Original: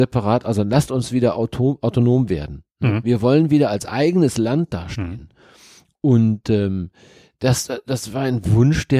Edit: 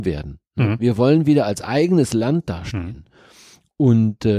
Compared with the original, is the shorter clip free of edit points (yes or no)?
yes